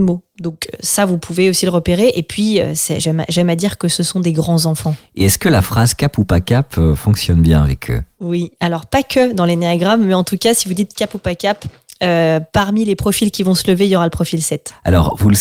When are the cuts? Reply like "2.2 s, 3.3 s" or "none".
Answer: none